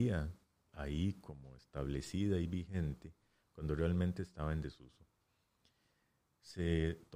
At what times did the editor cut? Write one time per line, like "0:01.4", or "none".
none